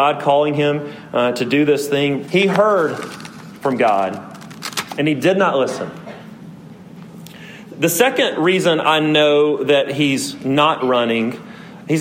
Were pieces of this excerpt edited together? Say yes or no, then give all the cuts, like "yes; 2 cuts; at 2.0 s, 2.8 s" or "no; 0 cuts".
yes; 1 cut; at 2.3 s